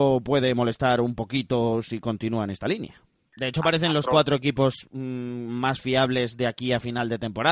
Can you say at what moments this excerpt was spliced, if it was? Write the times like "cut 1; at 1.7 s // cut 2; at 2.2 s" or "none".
cut 1; at 3.3 s